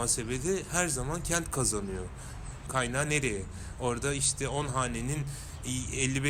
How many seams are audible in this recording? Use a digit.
1